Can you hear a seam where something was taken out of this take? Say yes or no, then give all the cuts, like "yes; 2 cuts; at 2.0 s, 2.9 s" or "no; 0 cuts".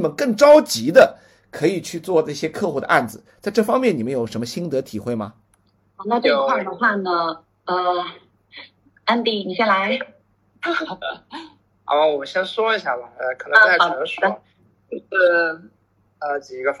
no; 0 cuts